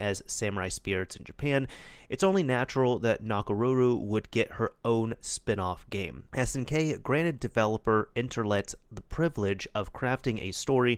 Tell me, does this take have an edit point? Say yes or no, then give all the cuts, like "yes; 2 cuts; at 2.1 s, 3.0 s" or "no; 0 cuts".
no; 0 cuts